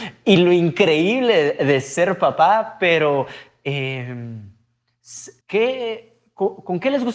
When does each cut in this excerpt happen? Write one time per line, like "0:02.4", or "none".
0:05.4